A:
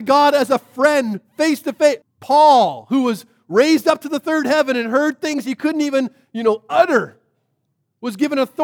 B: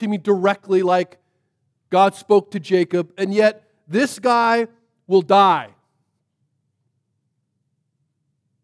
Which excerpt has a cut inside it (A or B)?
A